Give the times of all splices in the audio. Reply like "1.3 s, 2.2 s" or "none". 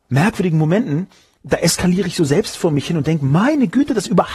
none